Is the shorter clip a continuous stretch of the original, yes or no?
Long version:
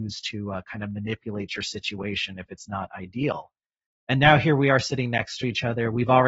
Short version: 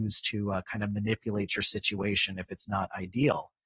yes